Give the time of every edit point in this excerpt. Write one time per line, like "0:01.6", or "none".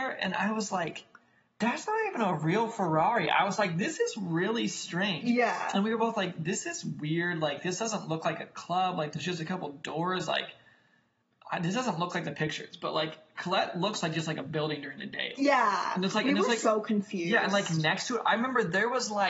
0:15.4